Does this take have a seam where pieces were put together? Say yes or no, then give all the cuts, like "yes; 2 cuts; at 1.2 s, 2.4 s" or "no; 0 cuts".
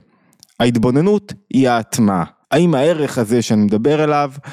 yes; 1 cut; at 2.4 s